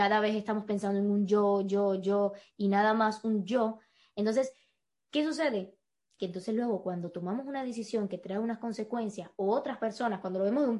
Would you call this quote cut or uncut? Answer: uncut